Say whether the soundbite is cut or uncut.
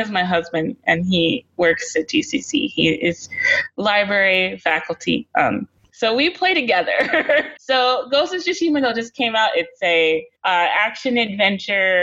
cut